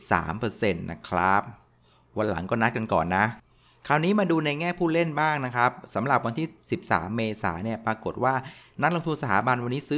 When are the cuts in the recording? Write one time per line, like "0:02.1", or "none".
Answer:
none